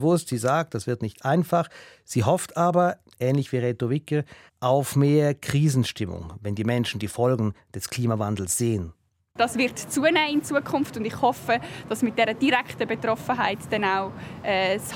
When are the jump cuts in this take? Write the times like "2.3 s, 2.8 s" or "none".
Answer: none

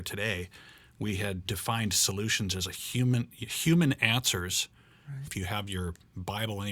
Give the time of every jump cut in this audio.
1.5 s, 5.3 s

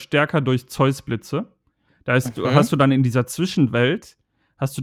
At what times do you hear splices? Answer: none

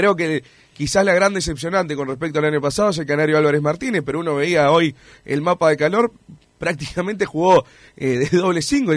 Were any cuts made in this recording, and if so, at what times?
none

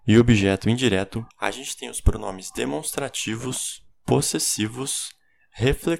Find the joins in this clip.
1.3 s

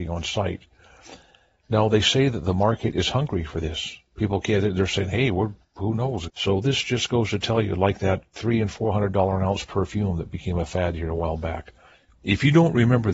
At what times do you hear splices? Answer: 6.3 s, 12.1 s

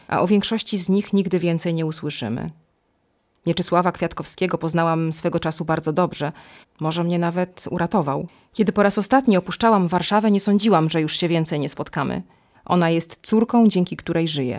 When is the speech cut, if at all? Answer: 6.6 s, 12.5 s

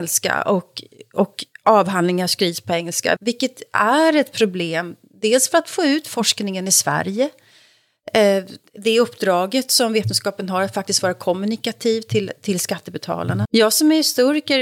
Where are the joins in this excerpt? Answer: 3.2 s, 13.5 s

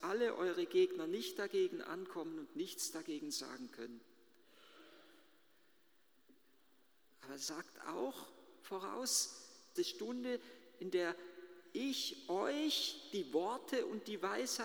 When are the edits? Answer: 7.0 s, 9.8 s

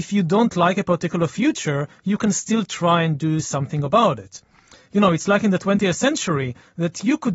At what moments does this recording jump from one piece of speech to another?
none

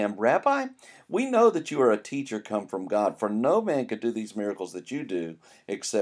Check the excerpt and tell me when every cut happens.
none

